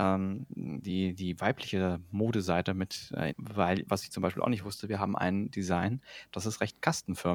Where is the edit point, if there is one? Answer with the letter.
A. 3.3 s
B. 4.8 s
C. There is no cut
A